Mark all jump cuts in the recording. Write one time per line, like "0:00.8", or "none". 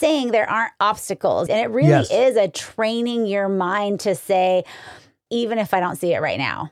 0:01.5
0:05.3

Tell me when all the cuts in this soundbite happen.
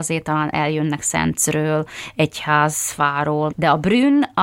0:03.5

